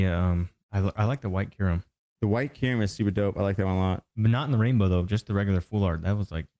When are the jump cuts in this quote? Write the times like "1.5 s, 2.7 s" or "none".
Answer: none